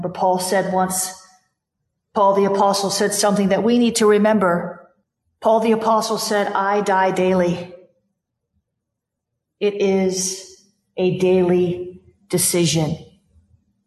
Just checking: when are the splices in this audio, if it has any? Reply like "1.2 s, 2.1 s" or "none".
none